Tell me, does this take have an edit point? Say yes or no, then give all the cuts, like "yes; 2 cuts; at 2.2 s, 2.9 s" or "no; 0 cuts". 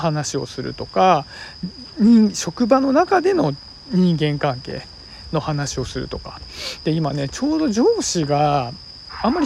no; 0 cuts